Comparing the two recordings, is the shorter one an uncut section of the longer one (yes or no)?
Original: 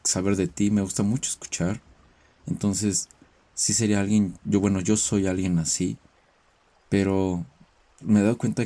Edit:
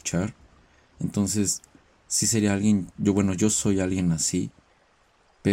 yes